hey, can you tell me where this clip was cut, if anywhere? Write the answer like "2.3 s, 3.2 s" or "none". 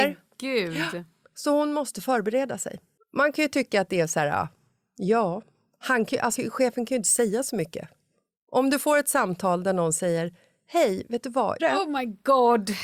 6.4 s, 11.6 s